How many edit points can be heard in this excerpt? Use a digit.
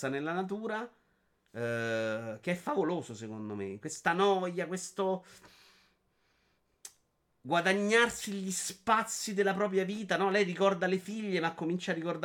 0